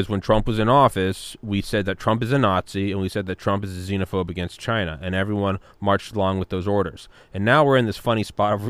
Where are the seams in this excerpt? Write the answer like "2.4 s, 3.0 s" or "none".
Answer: none